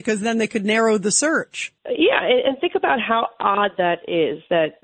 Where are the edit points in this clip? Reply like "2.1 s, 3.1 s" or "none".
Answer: 1.8 s